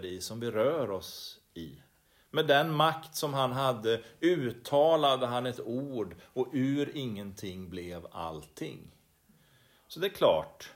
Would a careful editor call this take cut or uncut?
uncut